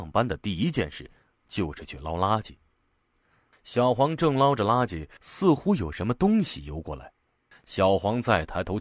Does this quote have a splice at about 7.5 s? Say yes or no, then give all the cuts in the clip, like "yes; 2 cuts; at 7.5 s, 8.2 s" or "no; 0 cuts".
yes; 3 cuts; at 3.5 s, 5.2 s, 7.5 s